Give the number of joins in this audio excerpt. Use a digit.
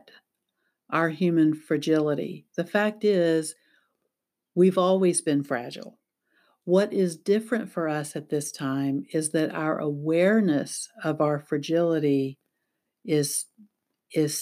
0